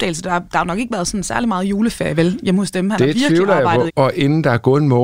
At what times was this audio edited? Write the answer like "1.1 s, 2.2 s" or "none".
3.9 s